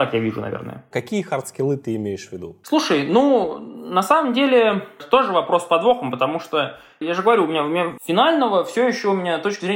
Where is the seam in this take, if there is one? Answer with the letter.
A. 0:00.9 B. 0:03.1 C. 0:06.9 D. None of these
A